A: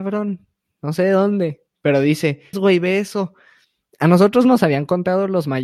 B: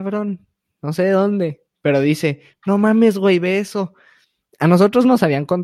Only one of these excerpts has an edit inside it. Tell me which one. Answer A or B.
A